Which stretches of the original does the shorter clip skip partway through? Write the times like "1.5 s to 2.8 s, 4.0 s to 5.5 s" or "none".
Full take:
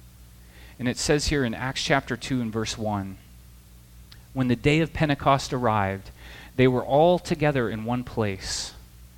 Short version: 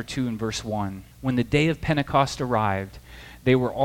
3.3 s to 4.2 s

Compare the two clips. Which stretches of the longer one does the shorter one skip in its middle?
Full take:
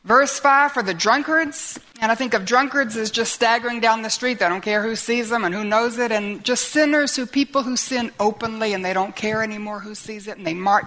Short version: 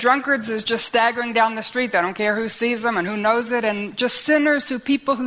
none

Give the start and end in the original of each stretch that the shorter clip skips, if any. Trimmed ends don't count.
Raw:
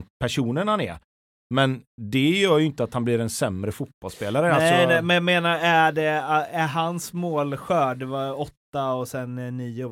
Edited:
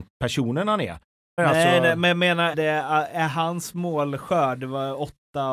1.4 s to 4.4 s, 5.6 s to 5.9 s

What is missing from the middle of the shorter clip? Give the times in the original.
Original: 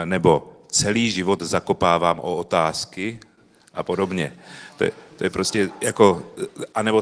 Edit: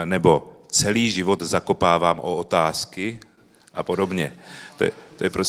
none

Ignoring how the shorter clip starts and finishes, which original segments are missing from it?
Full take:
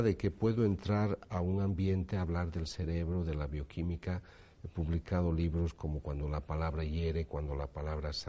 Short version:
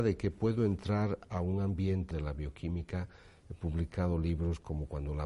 2.1 s to 3.2 s

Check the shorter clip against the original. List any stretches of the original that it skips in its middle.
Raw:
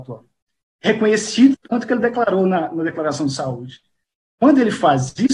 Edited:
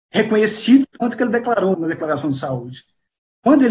2.4 s to 2.7 s

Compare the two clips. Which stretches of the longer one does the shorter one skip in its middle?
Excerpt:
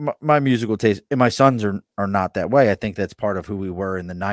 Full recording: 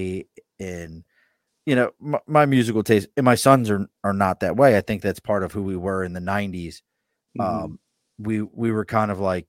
none

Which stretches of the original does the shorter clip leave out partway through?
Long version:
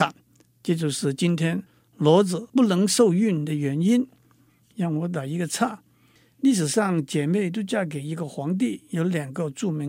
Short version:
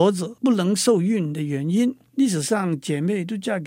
4.2 s to 6.3 s

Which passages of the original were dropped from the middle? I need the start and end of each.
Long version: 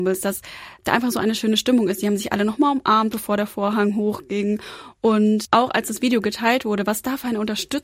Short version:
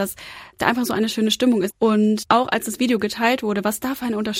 2.0 s to 4.9 s

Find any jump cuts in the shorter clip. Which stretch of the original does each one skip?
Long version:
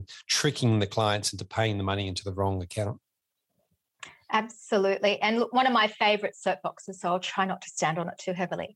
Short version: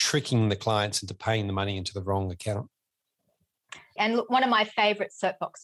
4.3 s to 5.2 s

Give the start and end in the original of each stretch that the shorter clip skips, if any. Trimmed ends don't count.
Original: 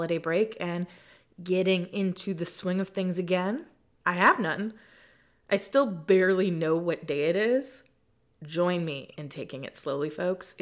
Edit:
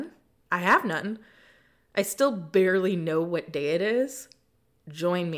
none

